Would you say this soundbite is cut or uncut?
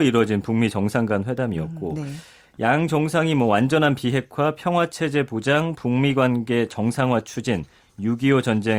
uncut